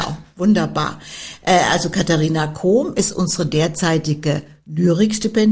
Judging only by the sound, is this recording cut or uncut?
uncut